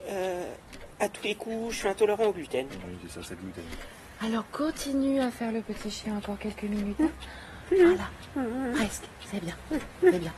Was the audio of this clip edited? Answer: no; 0 cuts

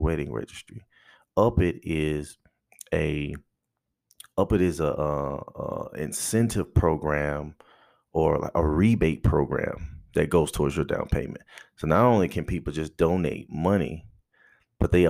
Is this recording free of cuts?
yes; 0 cuts

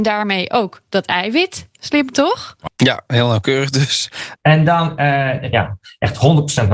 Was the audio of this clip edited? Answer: yes; 3 cuts; at 2.7 s, 4.4 s, 5.5 s

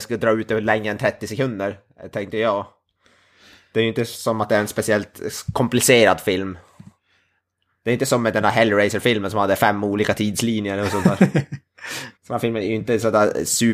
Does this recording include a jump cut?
yes; 1 cut; at 12.2 s

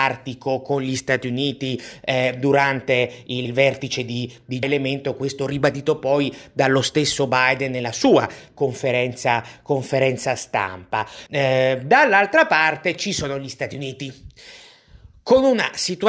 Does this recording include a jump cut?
yes; 3 cuts; at 3.4 s, 4.6 s, 11.3 s

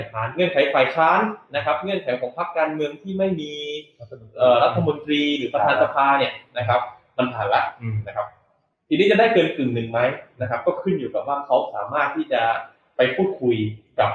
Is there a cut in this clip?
no; 0 cuts

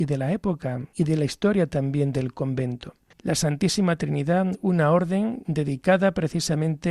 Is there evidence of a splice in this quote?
yes; 1 cut; at 3.1 s

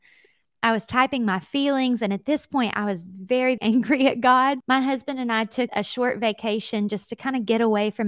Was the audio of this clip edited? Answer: yes; 3 cuts; at 3.6 s, 4.6 s, 5.7 s

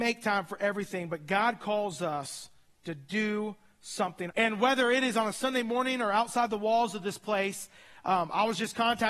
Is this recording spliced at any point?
yes; 1 cut; at 4.3 s

